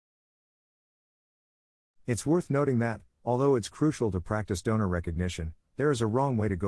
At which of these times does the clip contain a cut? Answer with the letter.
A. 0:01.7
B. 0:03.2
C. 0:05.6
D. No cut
D